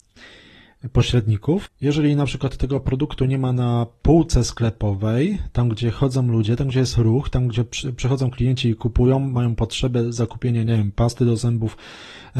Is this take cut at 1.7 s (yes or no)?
yes